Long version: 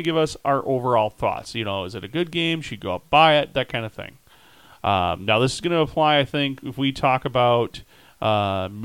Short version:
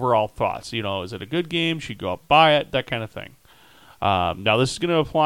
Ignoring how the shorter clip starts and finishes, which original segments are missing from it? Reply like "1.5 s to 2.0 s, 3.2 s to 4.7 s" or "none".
none